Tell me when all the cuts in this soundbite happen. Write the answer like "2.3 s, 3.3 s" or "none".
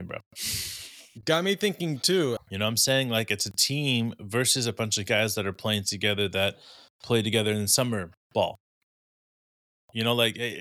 2.4 s